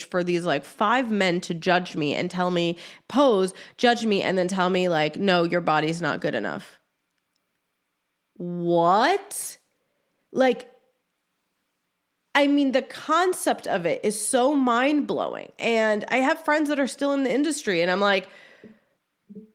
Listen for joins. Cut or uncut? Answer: uncut